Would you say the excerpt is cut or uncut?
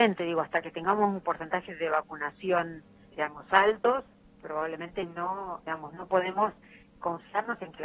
cut